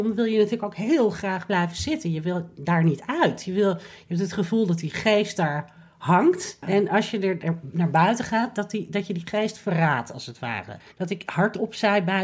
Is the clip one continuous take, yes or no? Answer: no